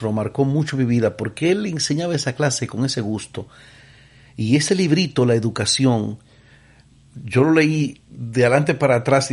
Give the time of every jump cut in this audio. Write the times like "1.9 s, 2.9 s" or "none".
none